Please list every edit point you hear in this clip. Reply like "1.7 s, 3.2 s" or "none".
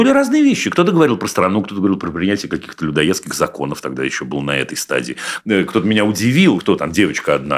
5.4 s, 6.6 s